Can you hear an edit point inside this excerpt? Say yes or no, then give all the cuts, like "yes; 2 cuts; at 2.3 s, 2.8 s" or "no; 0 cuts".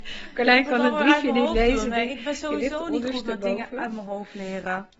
no; 0 cuts